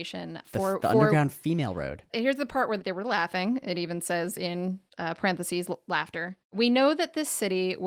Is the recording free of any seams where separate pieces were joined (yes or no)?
yes